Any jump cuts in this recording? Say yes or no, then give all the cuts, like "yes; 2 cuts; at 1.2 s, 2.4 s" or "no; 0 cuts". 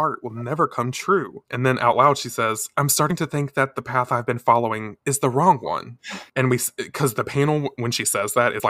no; 0 cuts